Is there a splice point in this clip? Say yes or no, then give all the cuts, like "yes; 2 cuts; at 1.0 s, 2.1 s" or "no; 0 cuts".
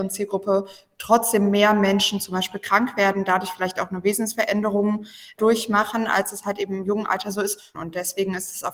yes; 1 cut; at 7.7 s